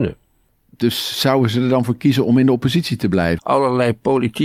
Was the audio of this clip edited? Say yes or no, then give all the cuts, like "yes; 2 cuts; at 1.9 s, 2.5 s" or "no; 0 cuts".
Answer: yes; 1 cut; at 3.4 s